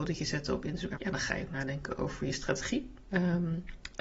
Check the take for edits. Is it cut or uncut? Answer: cut